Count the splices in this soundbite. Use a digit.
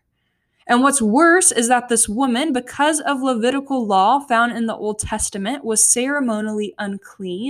0